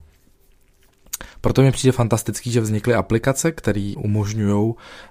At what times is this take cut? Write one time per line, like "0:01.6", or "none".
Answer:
0:03.9